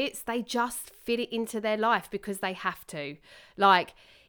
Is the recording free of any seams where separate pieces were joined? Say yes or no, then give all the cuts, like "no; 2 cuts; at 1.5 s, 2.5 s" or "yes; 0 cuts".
yes; 0 cuts